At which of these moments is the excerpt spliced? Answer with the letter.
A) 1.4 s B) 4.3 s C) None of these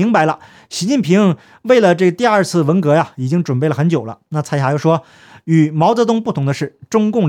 B